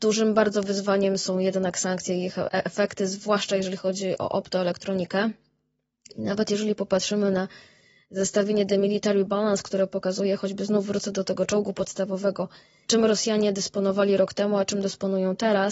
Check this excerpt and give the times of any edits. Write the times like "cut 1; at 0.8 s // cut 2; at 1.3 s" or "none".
none